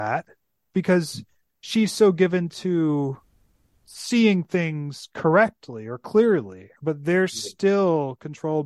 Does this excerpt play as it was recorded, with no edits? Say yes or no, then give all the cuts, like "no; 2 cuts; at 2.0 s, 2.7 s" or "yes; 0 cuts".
yes; 0 cuts